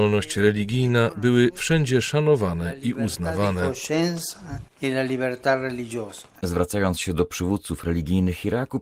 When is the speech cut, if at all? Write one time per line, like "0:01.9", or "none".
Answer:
none

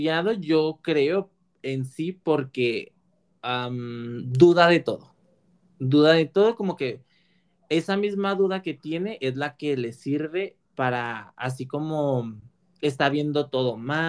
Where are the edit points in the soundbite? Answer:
none

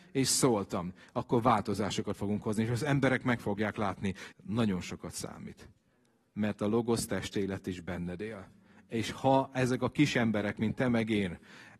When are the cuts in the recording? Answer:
0:04.3

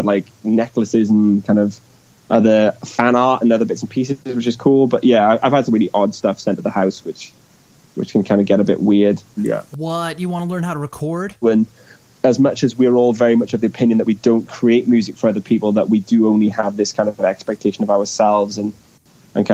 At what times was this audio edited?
0:05.7
0:09.4
0:11.4

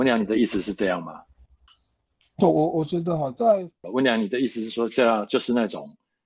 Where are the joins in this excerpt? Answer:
0:02.4
0:03.8

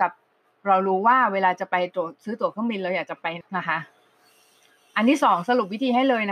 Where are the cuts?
0:03.4

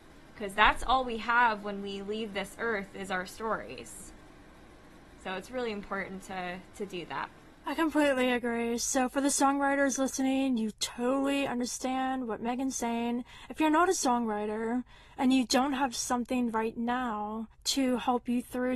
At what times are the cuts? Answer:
0:17.5

